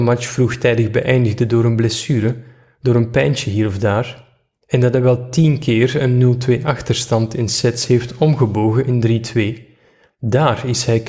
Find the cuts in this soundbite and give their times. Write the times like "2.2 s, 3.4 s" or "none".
none